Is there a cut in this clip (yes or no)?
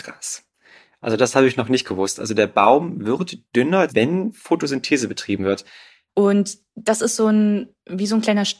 yes